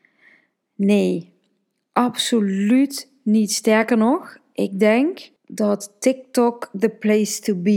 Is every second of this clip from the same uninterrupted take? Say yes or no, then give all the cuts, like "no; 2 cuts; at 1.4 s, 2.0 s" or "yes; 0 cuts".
no; 1 cut; at 5.4 s